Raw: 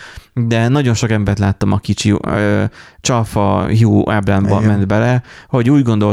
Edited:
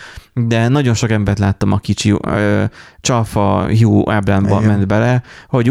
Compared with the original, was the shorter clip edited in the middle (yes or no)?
no